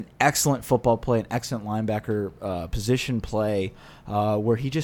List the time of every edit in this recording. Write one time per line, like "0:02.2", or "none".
none

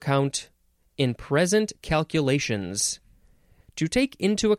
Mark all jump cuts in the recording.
0:03.6

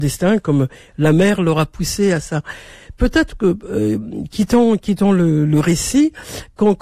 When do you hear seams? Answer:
none

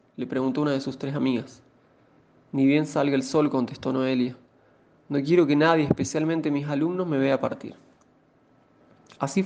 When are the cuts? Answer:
none

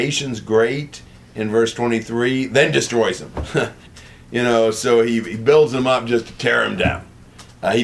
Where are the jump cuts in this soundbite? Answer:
0:03.9

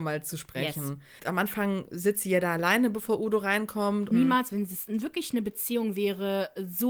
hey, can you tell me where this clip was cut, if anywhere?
0:01.2
0:04.1

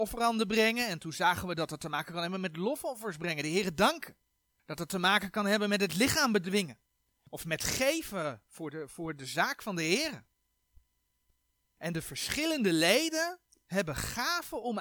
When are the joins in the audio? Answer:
none

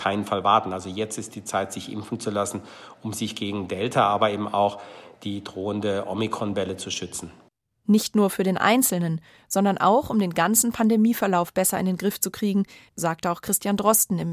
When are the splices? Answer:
0:12.9

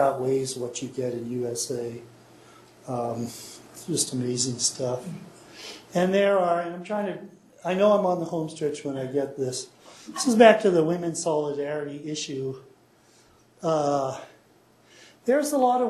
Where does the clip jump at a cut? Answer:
none

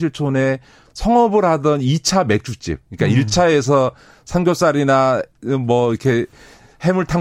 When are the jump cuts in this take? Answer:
none

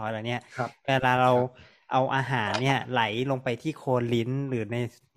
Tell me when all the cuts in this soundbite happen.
none

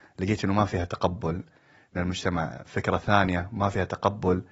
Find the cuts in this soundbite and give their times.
none

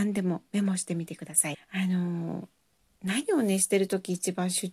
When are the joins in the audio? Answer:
0:01.5

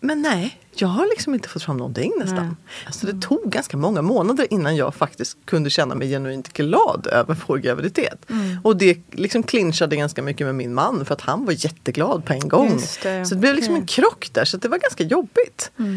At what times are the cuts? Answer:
0:02.8

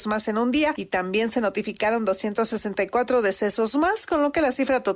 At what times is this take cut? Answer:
none

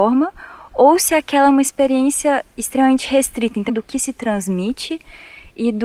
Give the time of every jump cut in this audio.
0:03.7

